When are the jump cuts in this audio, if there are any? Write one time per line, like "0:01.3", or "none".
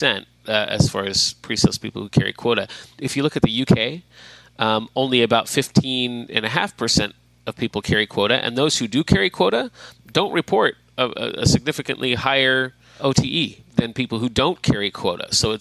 none